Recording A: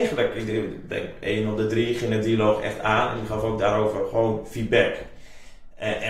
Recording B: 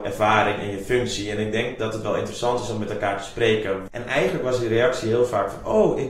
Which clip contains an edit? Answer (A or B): B